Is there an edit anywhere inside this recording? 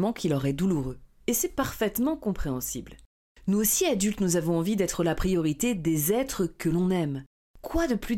no; 0 cuts

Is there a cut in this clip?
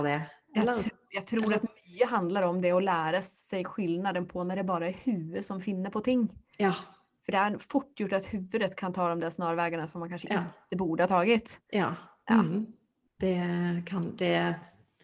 no; 0 cuts

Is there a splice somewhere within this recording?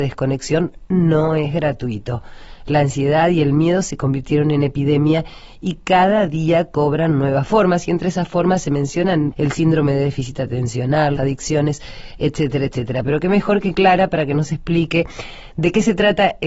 yes; 2 cuts; at 9.3 s, 11.2 s

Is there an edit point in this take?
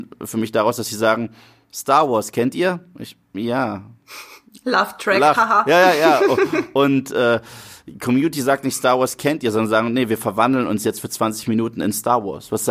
no; 0 cuts

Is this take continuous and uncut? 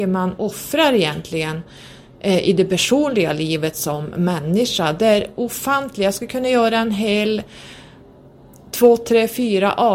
yes; 0 cuts

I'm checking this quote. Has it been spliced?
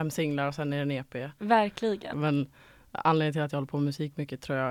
yes; 1 cut; at 2.1 s

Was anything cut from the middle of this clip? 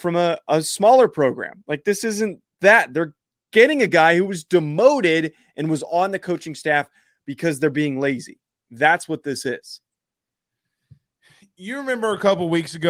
no; 0 cuts

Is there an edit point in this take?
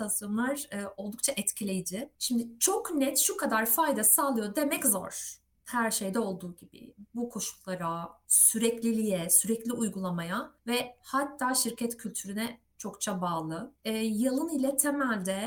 yes; 1 cut; at 8.2 s

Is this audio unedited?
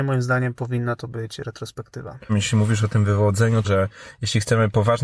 no; 2 cuts; at 2.3 s, 3.6 s

